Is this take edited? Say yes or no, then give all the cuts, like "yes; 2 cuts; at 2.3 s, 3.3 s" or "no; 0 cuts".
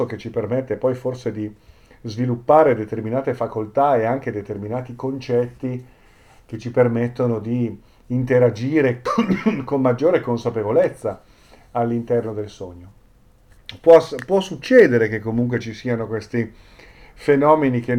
no; 0 cuts